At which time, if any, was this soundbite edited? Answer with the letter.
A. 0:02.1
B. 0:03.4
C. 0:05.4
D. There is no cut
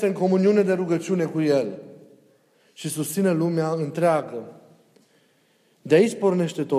D